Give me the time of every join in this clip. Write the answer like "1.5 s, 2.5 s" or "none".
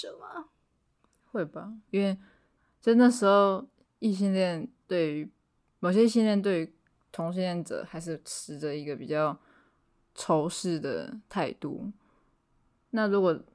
1.9 s